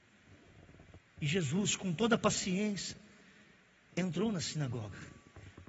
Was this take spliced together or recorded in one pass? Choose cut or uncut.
uncut